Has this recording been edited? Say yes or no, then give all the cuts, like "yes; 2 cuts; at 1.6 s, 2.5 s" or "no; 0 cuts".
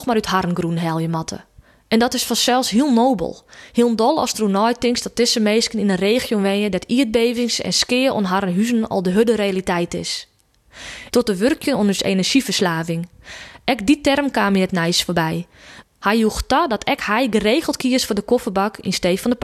yes; 2 cuts; at 11.1 s, 15.8 s